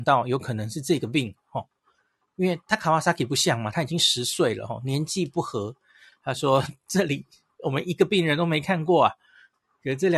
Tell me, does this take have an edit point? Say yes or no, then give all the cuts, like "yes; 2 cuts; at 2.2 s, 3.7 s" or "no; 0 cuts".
yes; 1 cut; at 6.1 s